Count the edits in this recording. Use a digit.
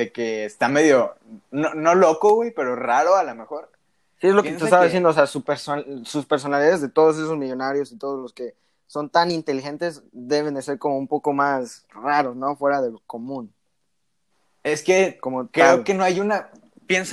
0